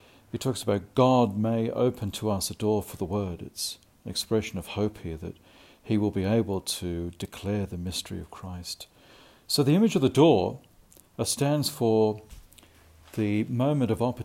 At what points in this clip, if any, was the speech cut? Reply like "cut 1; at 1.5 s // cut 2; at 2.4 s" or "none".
none